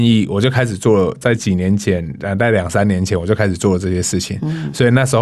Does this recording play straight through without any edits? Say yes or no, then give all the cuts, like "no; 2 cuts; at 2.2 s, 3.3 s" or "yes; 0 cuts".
yes; 0 cuts